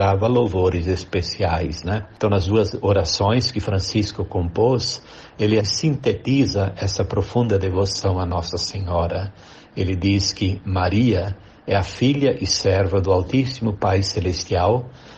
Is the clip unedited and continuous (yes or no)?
no